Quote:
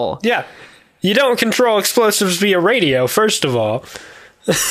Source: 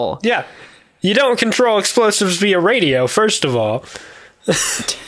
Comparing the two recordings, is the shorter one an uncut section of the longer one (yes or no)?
yes